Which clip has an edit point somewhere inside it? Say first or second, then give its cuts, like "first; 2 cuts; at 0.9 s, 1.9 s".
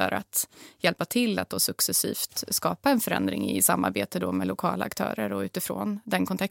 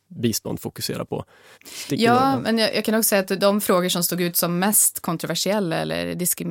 second; 1 cut; at 1.5 s